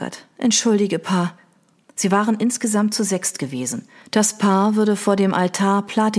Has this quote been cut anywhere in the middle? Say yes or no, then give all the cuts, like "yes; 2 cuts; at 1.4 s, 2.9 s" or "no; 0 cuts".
yes; 2 cuts; at 1.8 s, 4.0 s